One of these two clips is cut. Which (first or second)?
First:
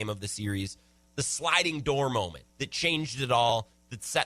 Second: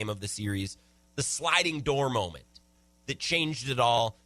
first